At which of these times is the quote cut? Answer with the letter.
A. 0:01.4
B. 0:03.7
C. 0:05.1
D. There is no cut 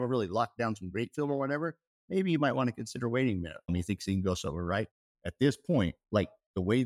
B